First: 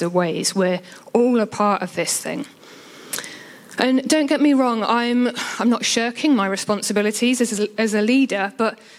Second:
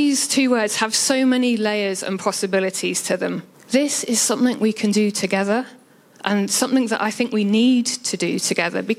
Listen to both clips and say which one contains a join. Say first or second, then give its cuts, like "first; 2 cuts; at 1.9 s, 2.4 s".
second; 1 cut; at 3.5 s